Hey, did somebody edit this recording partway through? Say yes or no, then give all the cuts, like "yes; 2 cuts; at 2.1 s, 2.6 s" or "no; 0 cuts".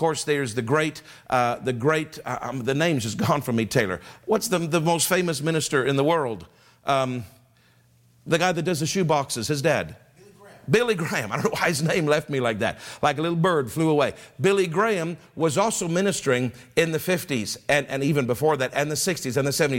no; 0 cuts